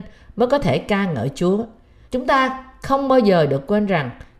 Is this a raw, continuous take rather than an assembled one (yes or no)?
no